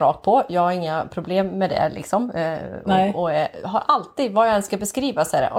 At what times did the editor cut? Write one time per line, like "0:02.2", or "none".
none